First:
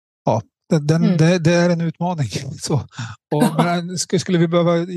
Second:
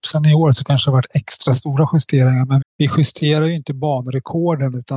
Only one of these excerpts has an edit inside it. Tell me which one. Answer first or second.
second